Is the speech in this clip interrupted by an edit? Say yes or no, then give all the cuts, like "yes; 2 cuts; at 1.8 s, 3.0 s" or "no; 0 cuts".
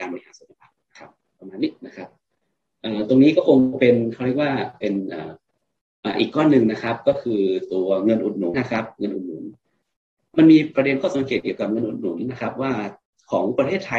yes; 1 cut; at 8.5 s